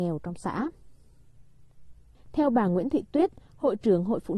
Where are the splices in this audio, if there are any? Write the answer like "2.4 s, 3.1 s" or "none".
2.1 s